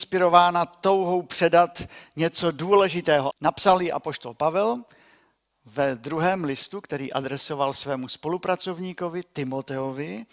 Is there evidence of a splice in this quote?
yes; 1 cut; at 3.3 s

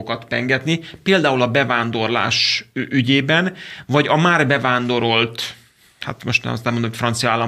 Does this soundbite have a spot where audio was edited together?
no; 0 cuts

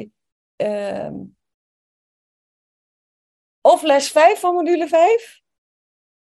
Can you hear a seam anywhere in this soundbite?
no; 0 cuts

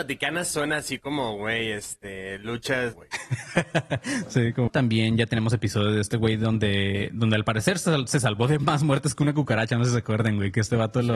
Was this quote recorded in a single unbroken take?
no; 2 cuts; at 2.9 s, 4.7 s

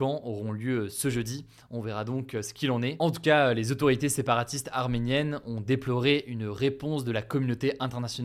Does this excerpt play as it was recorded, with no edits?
yes; 0 cuts

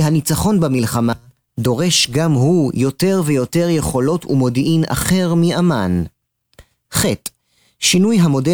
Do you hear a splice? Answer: no; 0 cuts

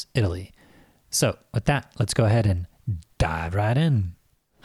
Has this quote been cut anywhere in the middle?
yes; 1 cut; at 3.1 s

